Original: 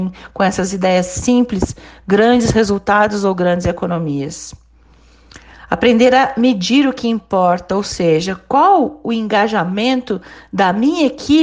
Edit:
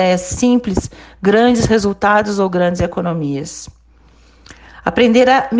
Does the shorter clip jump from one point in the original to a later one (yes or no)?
no